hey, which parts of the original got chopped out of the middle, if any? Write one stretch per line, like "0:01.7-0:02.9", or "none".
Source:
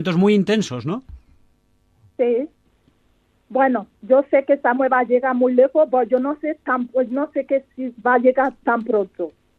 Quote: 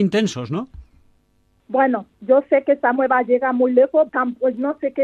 0:01.9-0:03.4
0:05.9-0:06.6

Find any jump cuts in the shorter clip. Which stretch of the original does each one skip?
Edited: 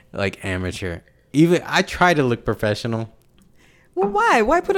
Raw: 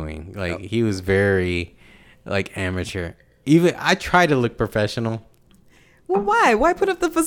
none

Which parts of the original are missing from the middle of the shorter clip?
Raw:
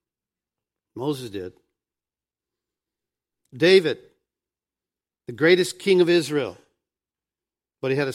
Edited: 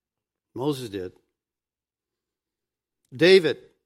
none

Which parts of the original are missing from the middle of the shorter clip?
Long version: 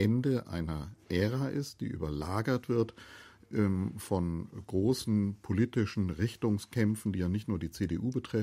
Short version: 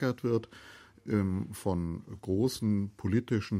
none

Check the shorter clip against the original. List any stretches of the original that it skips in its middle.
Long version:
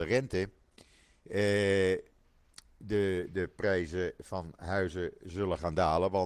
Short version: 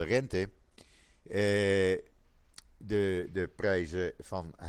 none

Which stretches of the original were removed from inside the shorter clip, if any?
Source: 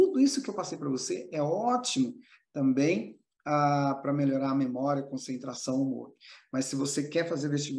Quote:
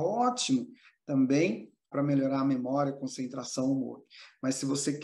0:03.4-0:04.0

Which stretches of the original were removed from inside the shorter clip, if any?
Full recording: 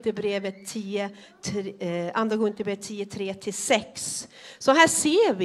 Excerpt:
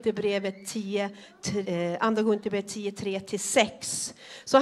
0:01.6-0:01.8

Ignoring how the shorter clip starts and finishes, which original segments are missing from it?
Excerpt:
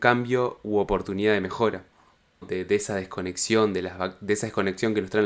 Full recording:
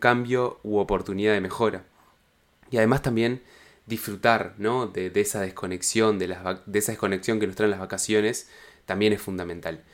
0:02.4-0:04.9

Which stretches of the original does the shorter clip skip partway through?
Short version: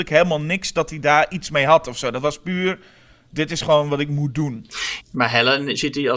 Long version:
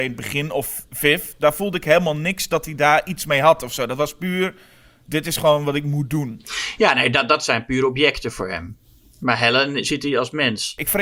0:06.8-0:09.1

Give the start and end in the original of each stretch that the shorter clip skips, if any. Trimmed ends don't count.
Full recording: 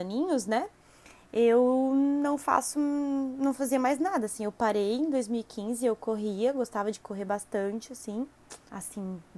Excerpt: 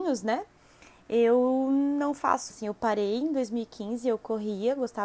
0:02.7-0:04.3

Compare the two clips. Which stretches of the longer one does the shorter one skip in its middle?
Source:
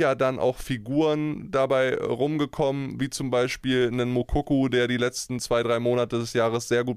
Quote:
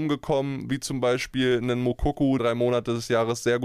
0:04.7-0:05.6

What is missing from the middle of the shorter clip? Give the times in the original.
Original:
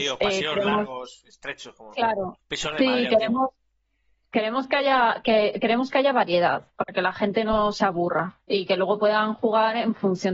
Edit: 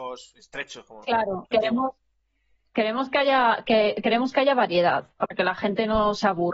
0:02.4-0:03.1

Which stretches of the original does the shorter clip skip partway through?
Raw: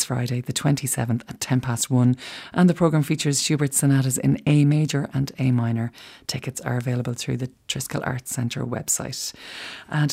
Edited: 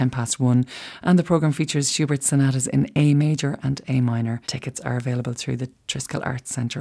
0:05.9-0:06.2

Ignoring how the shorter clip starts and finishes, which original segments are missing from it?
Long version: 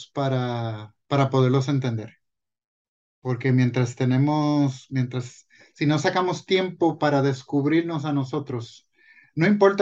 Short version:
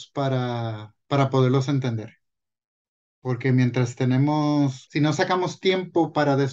0:04.9-0:05.7

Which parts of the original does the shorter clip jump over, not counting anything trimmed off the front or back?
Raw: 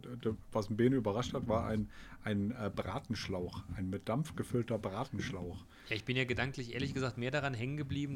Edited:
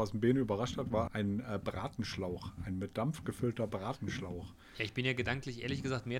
0:01.6-0:02.2

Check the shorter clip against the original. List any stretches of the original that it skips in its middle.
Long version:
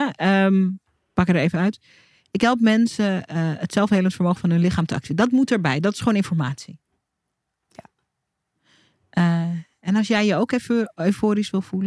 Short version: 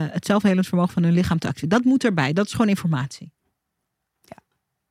none

